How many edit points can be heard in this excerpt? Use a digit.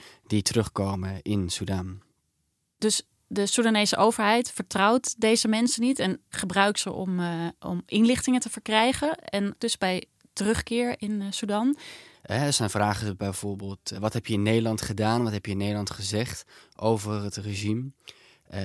2